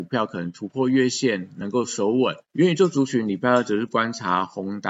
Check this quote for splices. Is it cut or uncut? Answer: cut